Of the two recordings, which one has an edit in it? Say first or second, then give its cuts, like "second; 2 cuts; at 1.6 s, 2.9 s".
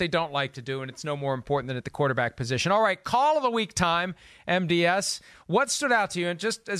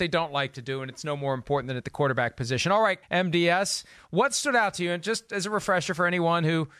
second; 1 cut; at 3.0 s